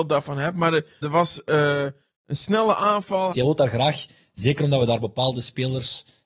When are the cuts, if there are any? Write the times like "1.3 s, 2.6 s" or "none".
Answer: 1.0 s, 3.3 s